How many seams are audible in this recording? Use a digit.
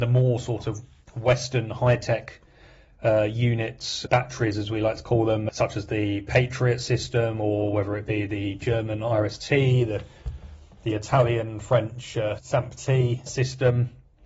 0